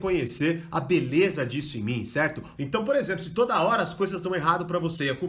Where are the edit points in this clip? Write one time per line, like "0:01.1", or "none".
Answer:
0:02.6